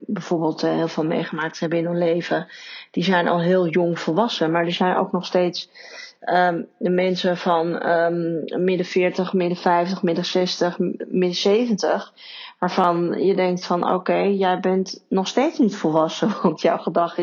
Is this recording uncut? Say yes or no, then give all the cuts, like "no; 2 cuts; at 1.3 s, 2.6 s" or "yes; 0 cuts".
yes; 0 cuts